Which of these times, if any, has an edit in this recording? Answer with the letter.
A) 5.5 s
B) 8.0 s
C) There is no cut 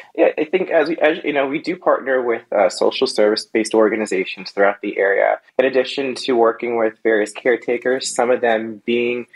A